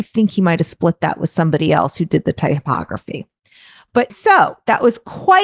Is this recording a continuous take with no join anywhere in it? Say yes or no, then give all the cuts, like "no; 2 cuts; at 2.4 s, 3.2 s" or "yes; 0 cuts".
no; 1 cut; at 4.1 s